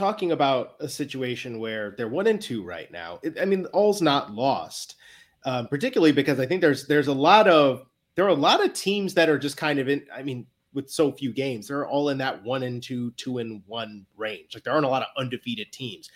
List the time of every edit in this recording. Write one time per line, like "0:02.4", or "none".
none